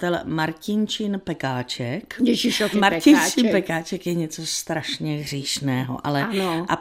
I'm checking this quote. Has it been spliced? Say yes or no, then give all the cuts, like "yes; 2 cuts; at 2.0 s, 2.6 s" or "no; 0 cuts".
yes; 1 cut; at 2.7 s